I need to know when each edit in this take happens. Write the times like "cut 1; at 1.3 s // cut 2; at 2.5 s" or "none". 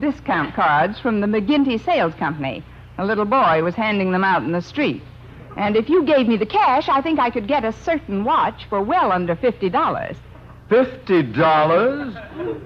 cut 1; at 10.6 s